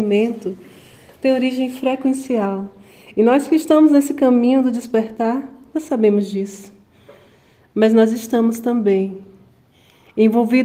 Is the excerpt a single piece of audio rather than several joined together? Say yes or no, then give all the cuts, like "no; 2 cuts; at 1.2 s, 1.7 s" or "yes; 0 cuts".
yes; 0 cuts